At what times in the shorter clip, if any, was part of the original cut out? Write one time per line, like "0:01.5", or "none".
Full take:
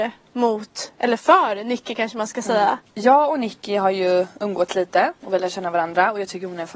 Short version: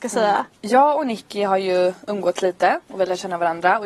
none